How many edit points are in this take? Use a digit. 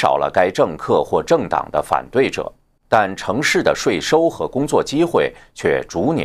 1